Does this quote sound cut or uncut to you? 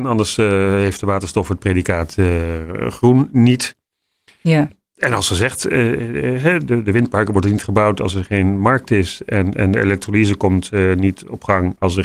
uncut